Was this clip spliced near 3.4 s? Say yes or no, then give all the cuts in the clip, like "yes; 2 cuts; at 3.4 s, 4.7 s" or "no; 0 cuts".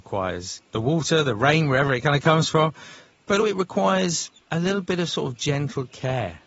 yes; 1 cut; at 3.4 s